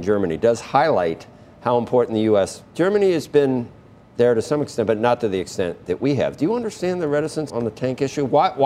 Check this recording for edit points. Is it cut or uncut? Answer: cut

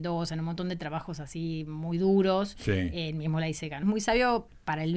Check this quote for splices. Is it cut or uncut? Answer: cut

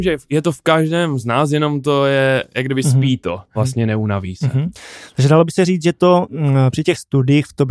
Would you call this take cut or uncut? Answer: cut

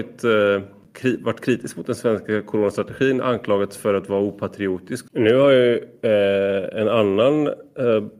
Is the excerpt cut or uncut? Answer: cut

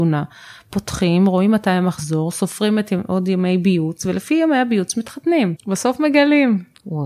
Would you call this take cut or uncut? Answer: cut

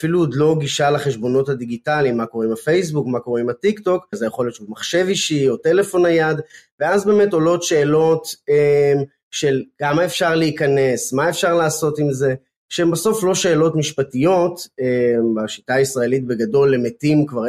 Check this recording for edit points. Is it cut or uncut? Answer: cut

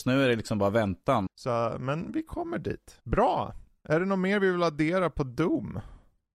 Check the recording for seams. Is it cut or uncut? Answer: cut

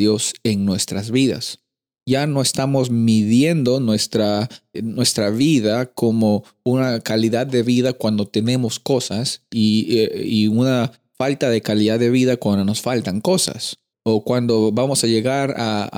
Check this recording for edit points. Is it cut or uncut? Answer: cut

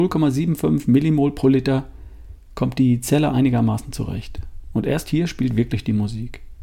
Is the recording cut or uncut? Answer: cut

